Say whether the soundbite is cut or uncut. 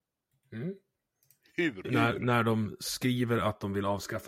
cut